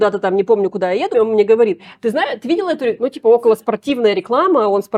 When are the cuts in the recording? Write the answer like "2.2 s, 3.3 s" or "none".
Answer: 1.1 s, 3.0 s